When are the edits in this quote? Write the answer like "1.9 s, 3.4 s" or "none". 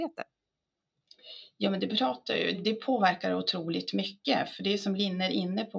2.5 s